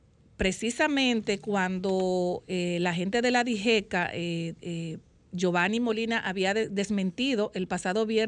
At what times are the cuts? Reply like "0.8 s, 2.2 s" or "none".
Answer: none